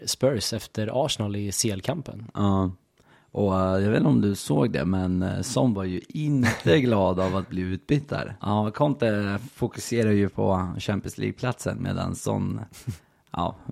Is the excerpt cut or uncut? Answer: cut